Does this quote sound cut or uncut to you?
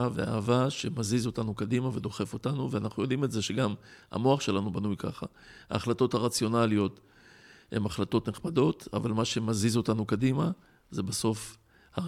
uncut